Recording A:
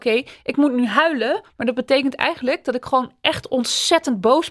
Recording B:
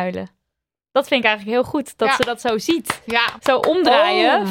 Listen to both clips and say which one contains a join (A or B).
B